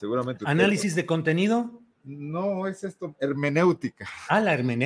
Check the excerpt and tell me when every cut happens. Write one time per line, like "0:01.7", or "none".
none